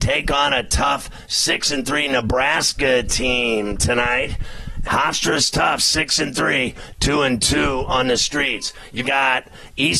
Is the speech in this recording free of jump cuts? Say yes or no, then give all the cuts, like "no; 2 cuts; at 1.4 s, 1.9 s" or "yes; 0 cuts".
no; 2 cuts; at 4.8 s, 9.0 s